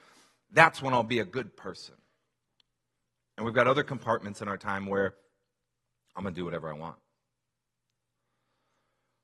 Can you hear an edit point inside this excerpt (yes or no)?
no